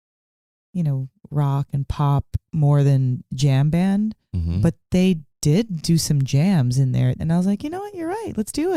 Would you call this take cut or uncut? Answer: cut